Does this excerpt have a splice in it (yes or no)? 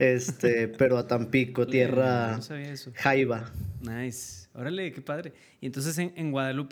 yes